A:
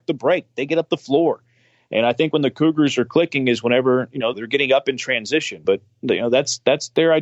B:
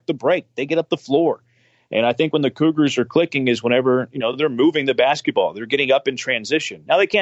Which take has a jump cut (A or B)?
A